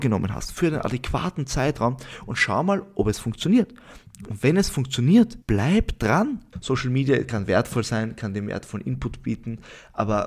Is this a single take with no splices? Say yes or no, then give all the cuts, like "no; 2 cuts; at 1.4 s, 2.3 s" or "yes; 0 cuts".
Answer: no; 2 cuts; at 5.4 s, 6.5 s